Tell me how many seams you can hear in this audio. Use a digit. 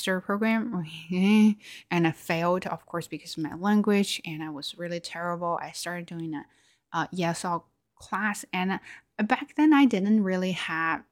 0